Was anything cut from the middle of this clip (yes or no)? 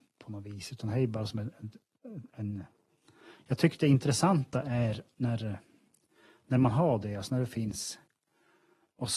no